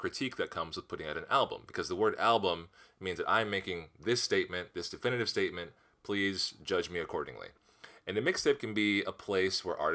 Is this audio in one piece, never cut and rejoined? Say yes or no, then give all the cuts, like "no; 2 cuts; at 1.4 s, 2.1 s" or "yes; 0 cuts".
yes; 0 cuts